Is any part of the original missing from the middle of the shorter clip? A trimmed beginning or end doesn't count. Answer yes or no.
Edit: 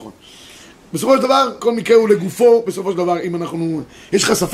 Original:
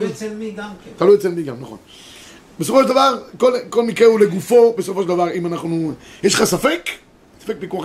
yes